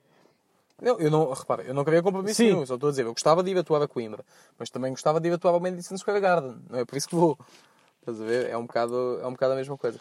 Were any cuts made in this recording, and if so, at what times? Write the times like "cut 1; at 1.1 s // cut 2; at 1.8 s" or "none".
none